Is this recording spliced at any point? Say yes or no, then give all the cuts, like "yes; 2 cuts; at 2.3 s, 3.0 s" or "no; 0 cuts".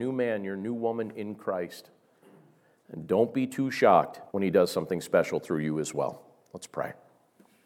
yes; 1 cut; at 4.3 s